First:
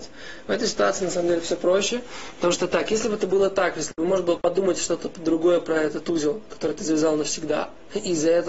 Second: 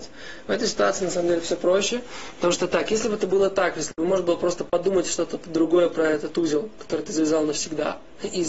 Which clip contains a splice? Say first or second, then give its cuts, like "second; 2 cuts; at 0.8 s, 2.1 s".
first; 1 cut; at 4.4 s